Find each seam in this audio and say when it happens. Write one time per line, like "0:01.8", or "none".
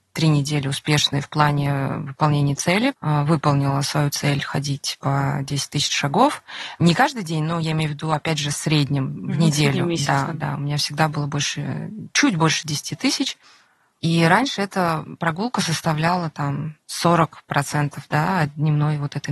0:02.9
0:13.9